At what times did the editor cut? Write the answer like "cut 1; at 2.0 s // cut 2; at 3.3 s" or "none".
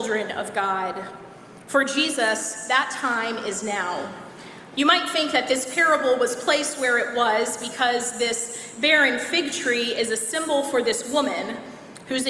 cut 1; at 4.7 s